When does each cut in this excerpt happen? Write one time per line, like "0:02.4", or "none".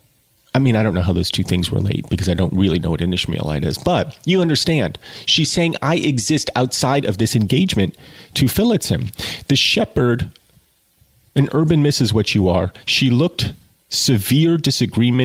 none